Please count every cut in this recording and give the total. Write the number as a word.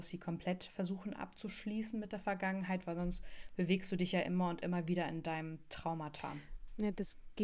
zero